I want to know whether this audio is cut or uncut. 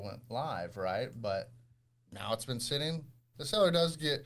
cut